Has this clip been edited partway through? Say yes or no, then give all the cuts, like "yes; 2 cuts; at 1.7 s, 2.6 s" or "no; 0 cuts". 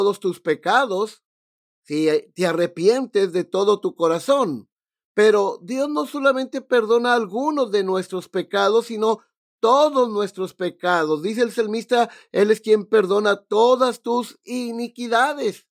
no; 0 cuts